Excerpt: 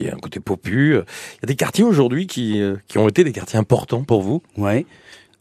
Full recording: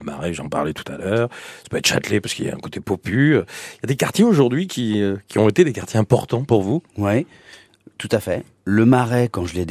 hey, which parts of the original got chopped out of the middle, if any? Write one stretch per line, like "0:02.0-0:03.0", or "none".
none